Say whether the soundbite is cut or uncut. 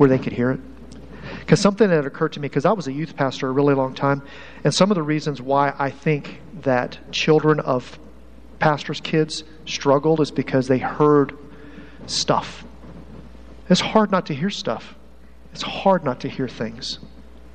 cut